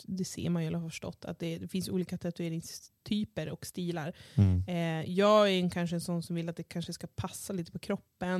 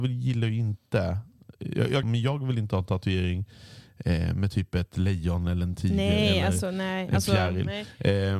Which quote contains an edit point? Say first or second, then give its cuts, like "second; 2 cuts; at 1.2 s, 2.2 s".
second; 1 cut; at 2.0 s